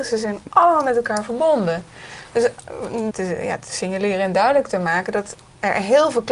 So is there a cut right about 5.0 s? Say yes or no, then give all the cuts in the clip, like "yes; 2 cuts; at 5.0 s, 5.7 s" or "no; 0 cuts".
no; 1 cut; at 3.1 s